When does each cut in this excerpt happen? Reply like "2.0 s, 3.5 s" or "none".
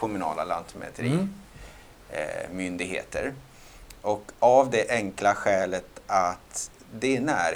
none